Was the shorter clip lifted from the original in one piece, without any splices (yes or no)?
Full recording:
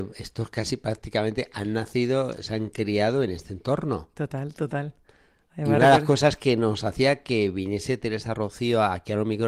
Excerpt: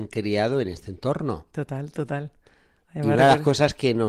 yes